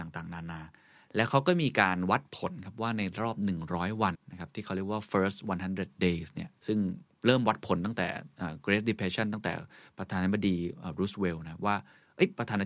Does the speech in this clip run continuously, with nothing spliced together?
no; 2 cuts; at 4.1 s, 6.6 s

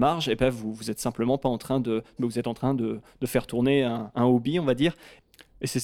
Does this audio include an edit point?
yes; 1 cut; at 2.2 s

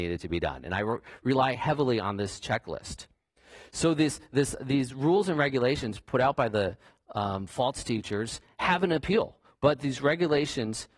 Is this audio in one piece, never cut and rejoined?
no; 1 cut; at 9.5 s

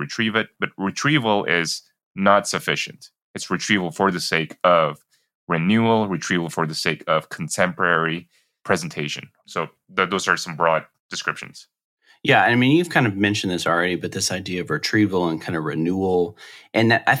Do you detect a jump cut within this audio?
no; 0 cuts

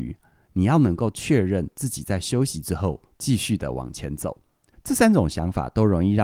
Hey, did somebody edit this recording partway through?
yes; 2 cuts; at 3.2 s, 4.7 s

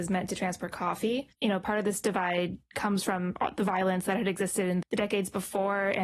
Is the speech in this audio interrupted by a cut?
yes; 2 cuts; at 1.3 s, 4.8 s

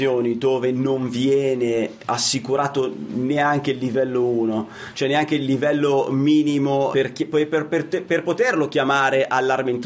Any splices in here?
yes; 1 cut; at 6.9 s

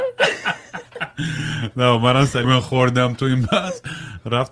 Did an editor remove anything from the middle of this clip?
yes; 1 cut; at 2.4 s

